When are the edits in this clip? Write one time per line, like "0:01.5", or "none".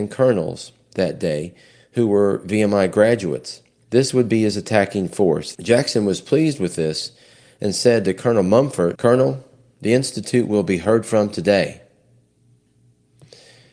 0:03.8
0:05.5
0:08.9